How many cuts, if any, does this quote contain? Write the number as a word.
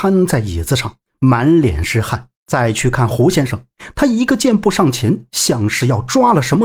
one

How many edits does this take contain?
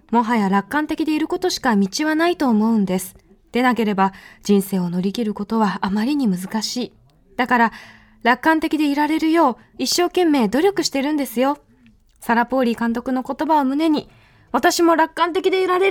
zero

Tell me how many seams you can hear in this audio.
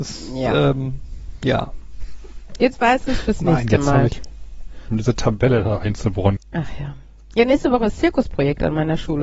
two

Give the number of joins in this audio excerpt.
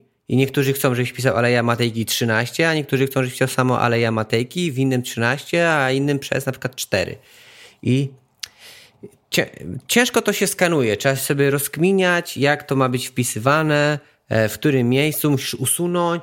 zero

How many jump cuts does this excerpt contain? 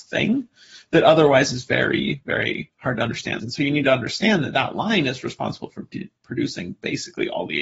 one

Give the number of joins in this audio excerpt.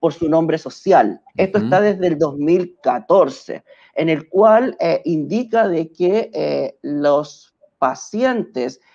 one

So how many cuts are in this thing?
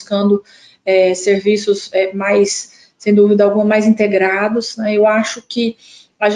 zero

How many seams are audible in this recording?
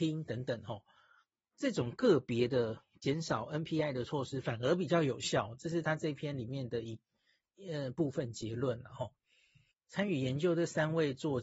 one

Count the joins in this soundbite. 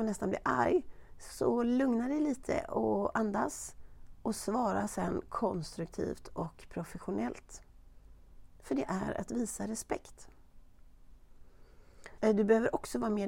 one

